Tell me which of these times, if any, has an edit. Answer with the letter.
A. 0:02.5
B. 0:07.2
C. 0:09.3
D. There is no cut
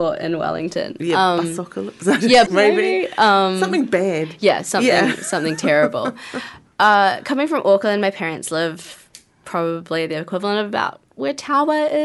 A